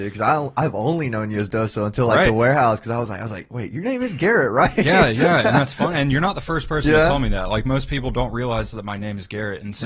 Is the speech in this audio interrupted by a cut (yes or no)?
no